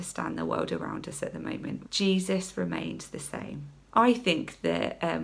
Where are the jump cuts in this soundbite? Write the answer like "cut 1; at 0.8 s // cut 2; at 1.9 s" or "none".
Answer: cut 1; at 1.8 s // cut 2; at 3.9 s